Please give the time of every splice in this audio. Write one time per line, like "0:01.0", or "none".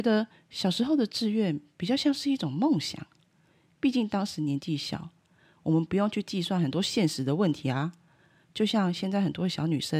none